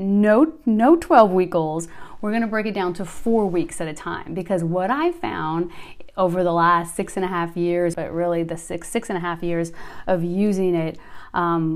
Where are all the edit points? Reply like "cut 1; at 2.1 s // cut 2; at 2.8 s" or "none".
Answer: cut 1; at 7.9 s